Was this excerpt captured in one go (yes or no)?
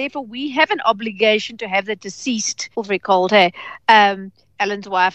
no